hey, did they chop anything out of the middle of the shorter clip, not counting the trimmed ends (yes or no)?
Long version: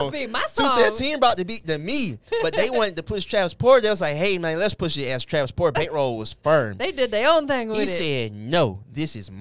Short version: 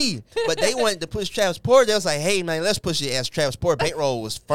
no